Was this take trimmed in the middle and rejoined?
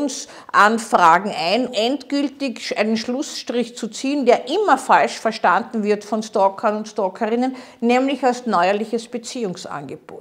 yes; 1 cut; at 1.7 s

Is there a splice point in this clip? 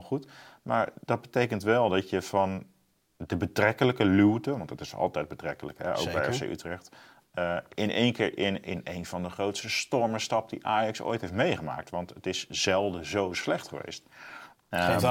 no; 0 cuts

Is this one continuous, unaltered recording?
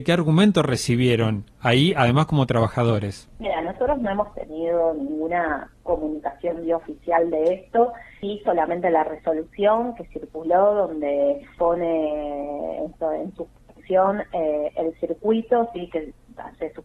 yes; 0 cuts

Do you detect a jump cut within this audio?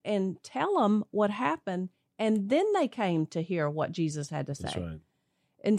no; 0 cuts

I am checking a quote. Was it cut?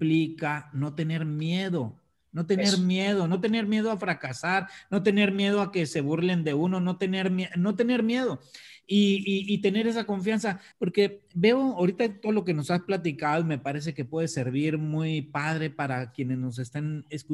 yes; 1 cut; at 10.7 s

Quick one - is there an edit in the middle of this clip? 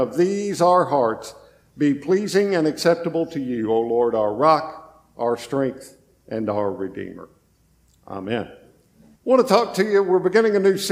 yes; 1 cut; at 9.2 s

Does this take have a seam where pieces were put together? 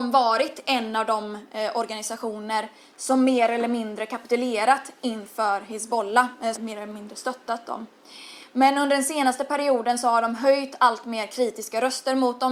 yes; 1 cut; at 6.5 s

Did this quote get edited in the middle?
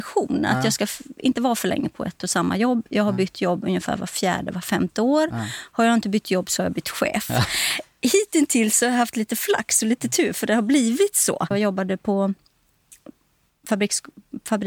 yes; 1 cut; at 11.5 s

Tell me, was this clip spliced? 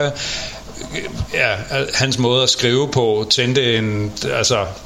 no; 0 cuts

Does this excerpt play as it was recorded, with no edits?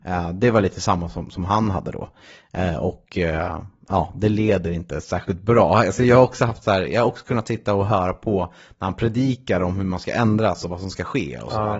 yes; 0 cuts

